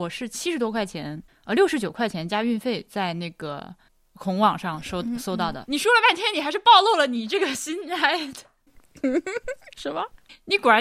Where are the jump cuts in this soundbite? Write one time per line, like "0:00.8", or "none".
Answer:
0:05.6